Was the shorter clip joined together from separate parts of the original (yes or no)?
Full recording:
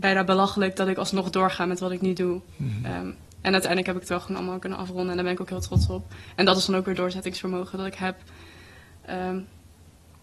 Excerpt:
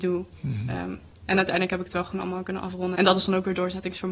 yes